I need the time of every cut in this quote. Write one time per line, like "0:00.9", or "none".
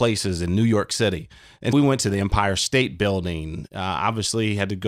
0:01.7